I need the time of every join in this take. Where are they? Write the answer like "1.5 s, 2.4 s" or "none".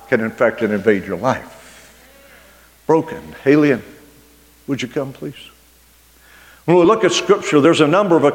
none